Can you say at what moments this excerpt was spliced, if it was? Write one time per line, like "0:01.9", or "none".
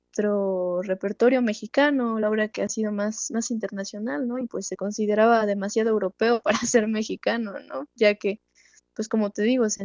none